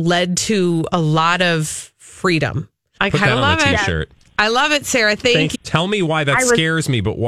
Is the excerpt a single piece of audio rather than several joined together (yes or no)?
no